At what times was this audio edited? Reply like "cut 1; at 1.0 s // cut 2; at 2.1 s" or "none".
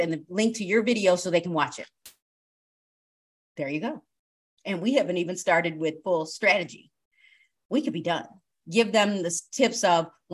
cut 1; at 8.6 s